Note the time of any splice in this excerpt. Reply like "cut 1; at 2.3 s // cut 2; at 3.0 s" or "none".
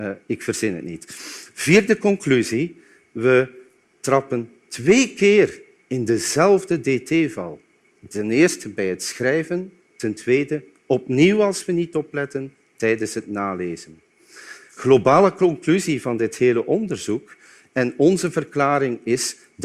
cut 1; at 17.6 s